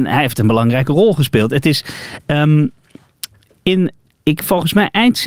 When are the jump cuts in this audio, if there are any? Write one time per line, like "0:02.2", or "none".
none